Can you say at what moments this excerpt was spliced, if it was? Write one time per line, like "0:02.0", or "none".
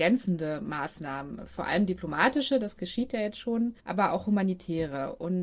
0:03.8

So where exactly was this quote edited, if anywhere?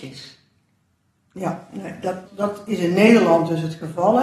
0:02.3

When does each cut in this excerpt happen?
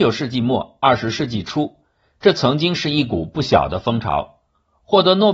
none

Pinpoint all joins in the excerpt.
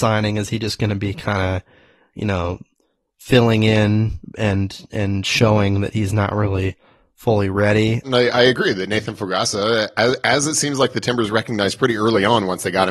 0:08.0

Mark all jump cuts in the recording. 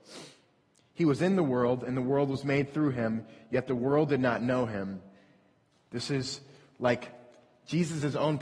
0:05.7

